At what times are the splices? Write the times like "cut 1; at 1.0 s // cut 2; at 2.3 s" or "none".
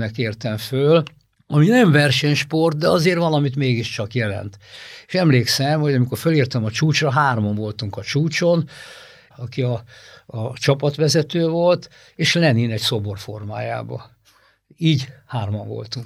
cut 1; at 9.3 s